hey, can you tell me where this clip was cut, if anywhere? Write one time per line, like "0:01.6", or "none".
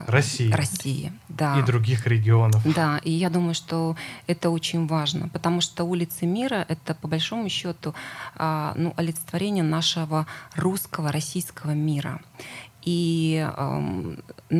none